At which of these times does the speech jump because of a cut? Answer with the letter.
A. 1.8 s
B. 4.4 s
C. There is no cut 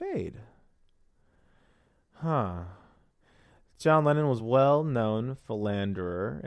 C